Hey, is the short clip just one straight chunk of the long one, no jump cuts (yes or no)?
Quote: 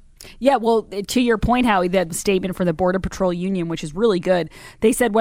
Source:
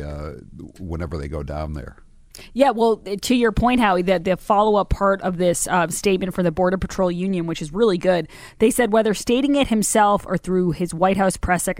no